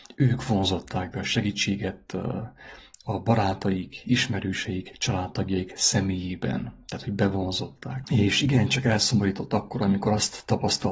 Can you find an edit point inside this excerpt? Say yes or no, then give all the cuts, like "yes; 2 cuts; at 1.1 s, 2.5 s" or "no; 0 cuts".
yes; 1 cut; at 8.0 s